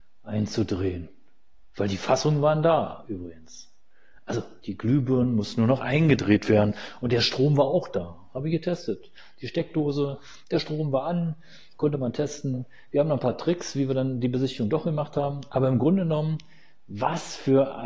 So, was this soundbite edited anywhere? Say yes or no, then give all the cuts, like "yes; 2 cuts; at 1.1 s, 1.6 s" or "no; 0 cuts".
no; 0 cuts